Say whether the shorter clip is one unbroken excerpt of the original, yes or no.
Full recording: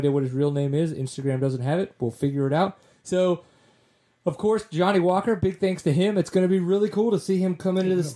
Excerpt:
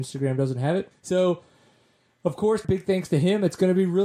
no